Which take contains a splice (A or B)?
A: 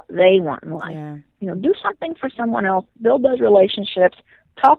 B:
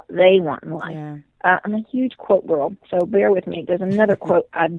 B